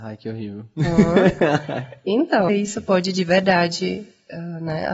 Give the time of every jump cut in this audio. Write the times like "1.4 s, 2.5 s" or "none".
2.5 s